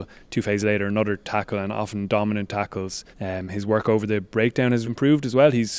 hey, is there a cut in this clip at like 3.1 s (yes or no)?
yes